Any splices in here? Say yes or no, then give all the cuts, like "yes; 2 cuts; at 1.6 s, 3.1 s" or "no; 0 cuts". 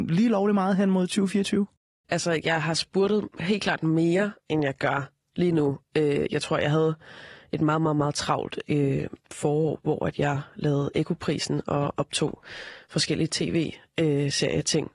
yes; 1 cut; at 2.0 s